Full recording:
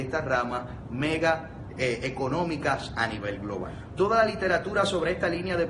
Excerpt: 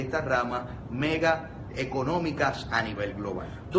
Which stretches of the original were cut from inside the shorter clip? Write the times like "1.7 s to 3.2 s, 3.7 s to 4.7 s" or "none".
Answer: 1.7 s to 2.0 s